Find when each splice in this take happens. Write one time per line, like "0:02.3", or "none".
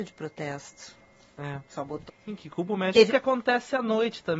0:02.1
0:03.1